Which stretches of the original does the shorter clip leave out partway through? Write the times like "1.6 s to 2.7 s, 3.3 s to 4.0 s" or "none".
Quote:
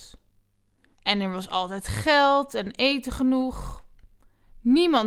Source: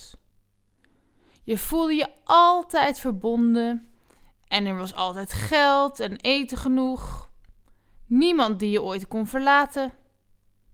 0.9 s to 4.4 s

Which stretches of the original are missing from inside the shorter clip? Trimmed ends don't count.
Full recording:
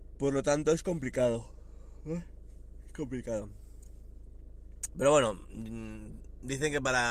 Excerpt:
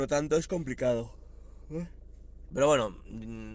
2.8 s to 4.9 s

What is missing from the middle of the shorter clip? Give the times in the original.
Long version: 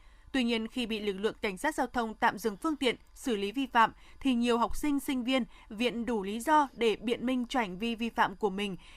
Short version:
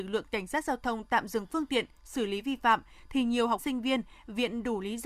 4.7 s to 5.0 s

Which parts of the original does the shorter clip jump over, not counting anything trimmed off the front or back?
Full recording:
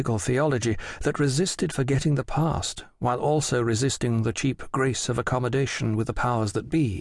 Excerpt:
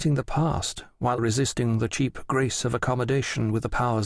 3.2 s to 3.6 s

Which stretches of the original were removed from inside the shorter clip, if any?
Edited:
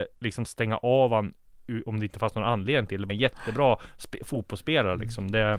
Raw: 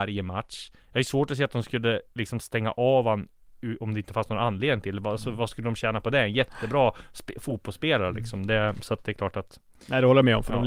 5.0 s to 6.2 s

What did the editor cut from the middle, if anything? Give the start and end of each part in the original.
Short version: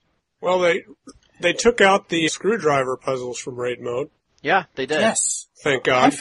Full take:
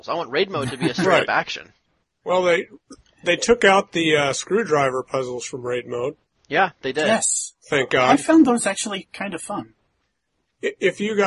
4.1 s to 4.3 s

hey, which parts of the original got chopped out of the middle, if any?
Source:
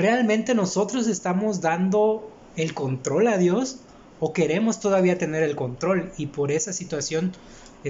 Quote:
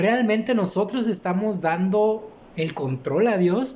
none

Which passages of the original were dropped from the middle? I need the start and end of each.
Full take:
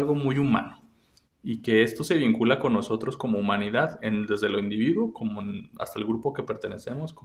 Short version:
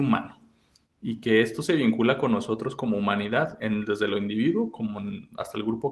none

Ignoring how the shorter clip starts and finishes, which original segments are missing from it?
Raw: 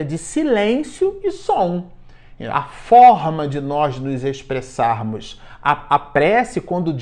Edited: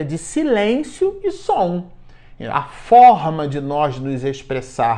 none

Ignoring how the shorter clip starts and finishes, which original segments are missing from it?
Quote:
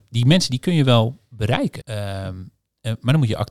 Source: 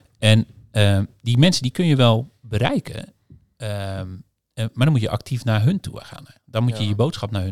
2.9 s to 3.5 s

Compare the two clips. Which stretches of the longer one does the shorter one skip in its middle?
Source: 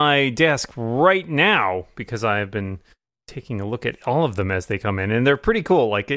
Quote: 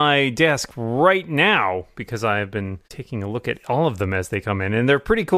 2.8 s to 3.2 s

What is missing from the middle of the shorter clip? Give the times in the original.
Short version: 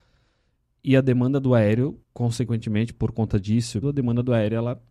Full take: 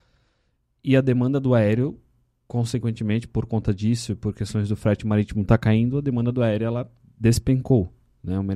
2.0 s to 2.4 s, 4.2 s to 5.9 s

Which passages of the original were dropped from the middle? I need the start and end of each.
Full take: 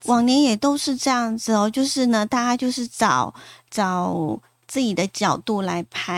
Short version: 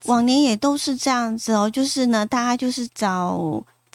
2.9 s to 3.6 s

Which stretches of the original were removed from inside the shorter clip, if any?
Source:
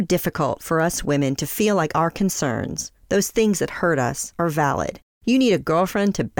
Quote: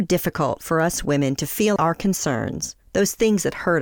1.8 s to 1.9 s

